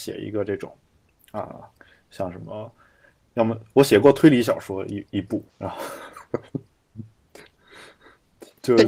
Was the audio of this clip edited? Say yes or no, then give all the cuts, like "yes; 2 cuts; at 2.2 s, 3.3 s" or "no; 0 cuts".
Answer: yes; 1 cut; at 5.5 s